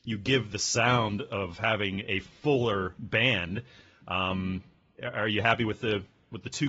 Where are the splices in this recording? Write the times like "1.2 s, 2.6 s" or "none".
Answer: none